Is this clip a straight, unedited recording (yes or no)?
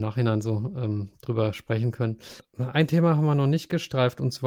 yes